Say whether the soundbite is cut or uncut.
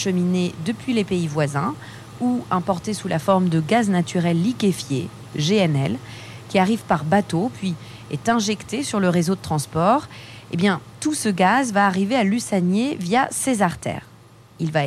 uncut